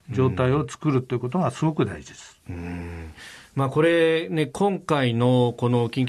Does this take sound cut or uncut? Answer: uncut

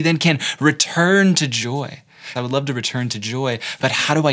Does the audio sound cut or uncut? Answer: cut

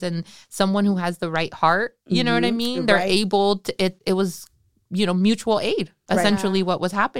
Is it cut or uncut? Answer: uncut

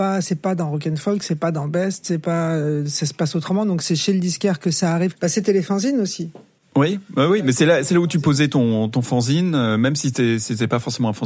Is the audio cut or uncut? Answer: uncut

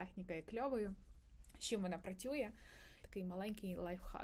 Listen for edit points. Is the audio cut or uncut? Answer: cut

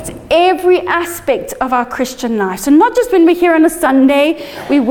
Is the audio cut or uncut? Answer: uncut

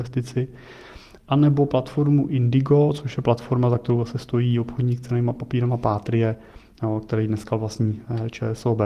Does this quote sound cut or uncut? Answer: uncut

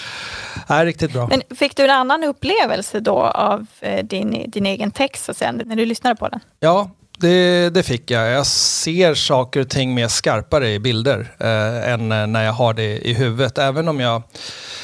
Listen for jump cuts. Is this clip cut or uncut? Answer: uncut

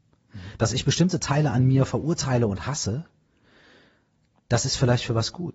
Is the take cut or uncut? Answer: uncut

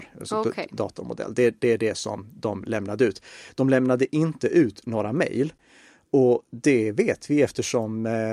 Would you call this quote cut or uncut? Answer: uncut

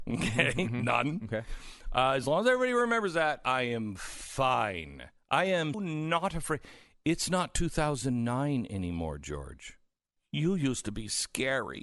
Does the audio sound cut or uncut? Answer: cut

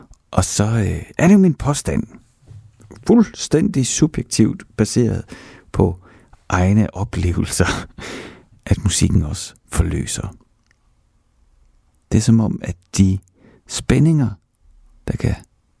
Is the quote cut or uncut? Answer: uncut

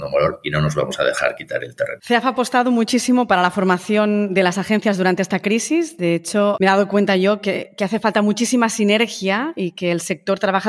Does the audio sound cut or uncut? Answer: uncut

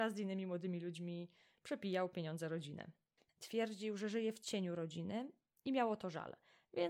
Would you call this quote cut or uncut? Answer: uncut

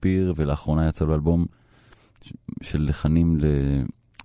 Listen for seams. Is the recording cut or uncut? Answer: uncut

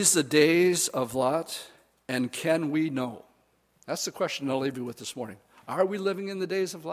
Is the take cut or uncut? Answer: uncut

